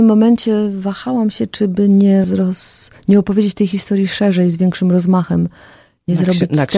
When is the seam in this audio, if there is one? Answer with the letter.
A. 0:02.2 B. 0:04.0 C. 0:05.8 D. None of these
A